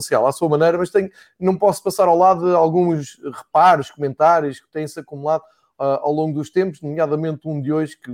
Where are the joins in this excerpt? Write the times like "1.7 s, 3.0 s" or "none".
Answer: none